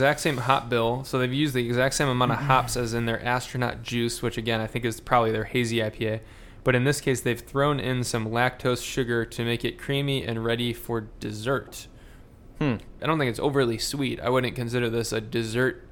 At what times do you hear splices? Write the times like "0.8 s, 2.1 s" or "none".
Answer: 13.0 s